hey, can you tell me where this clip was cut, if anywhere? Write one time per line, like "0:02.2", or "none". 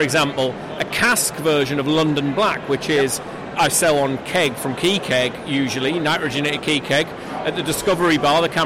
none